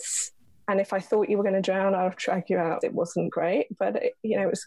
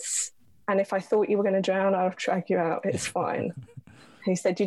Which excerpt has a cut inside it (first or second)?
first